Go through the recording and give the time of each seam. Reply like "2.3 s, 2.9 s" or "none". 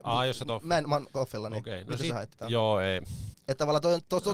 3.3 s